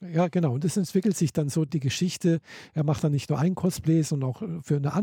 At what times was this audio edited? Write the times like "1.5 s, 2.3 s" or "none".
1.7 s